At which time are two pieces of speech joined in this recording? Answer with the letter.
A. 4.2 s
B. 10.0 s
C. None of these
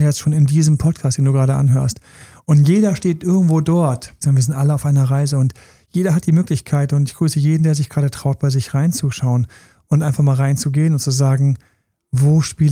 A